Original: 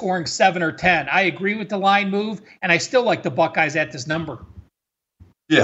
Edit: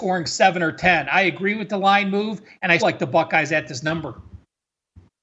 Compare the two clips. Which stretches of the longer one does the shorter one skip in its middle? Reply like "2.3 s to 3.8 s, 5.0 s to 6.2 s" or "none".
2.8 s to 3.0 s